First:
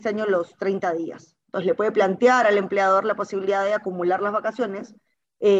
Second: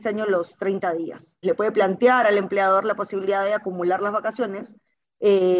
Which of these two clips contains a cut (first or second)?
second